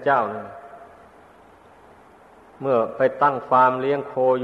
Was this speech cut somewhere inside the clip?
no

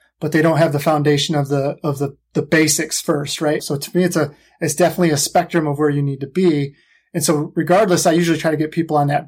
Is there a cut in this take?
yes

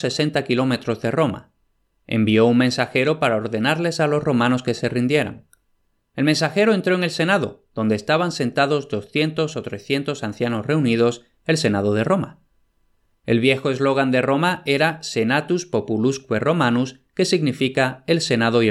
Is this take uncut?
yes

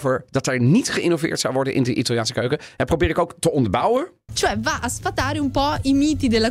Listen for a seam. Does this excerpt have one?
yes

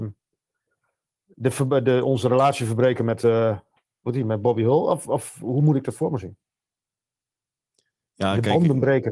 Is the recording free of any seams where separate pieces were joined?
yes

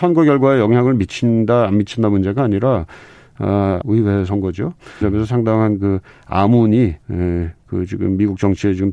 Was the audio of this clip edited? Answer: yes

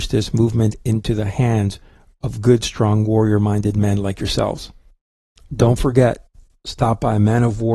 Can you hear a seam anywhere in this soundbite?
no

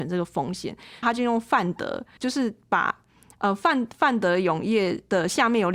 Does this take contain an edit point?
yes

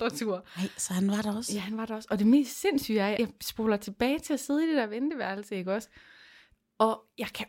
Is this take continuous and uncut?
no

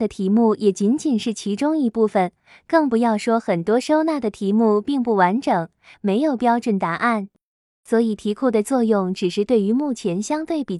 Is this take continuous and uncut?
no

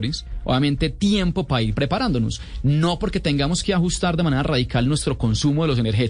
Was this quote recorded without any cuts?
yes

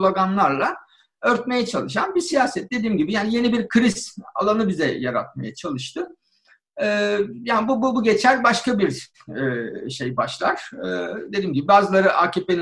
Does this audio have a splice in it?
no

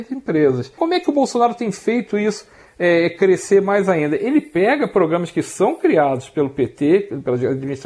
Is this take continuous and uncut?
yes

